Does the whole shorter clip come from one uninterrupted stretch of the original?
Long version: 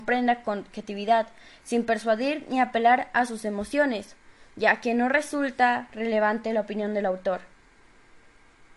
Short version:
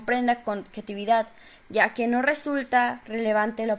no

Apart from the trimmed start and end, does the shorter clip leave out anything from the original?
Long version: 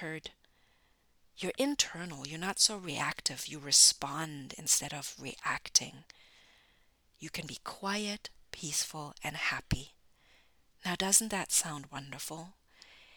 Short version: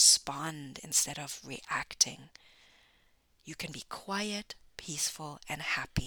no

